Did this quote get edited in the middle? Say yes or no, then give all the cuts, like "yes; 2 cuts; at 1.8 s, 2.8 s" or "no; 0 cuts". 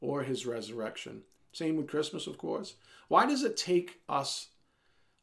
yes; 1 cut; at 1.4 s